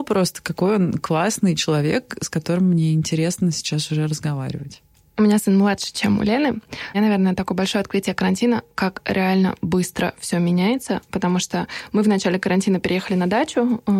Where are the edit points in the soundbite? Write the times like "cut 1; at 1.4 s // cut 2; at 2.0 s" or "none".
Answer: cut 1; at 6.9 s